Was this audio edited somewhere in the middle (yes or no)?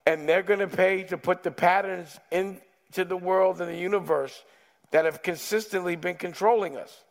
no